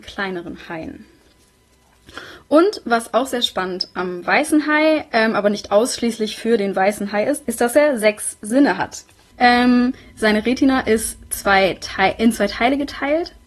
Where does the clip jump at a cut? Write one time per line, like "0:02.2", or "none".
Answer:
0:07.4
0:09.3